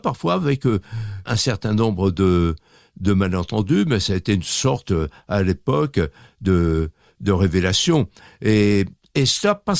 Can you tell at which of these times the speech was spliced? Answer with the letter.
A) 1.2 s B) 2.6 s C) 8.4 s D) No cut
A